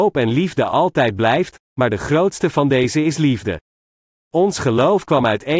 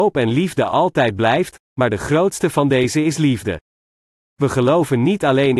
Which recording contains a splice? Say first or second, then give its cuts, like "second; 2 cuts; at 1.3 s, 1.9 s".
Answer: first; 1 cut; at 4.2 s